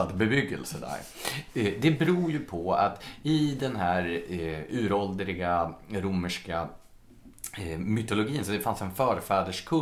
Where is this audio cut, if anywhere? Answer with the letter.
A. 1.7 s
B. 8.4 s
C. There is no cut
C